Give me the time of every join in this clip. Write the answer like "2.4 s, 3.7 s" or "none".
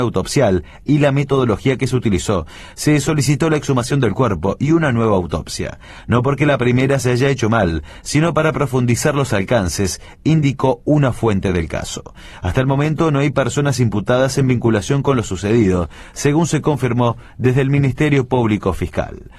12.4 s